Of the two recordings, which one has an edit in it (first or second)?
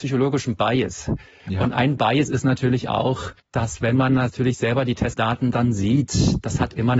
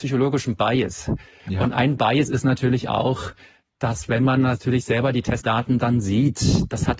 first